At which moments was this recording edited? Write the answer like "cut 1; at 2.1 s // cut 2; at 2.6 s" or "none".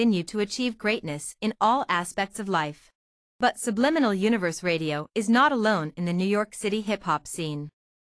none